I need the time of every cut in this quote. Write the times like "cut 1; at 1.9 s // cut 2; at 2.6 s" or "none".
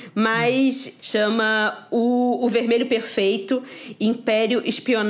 cut 1; at 1.0 s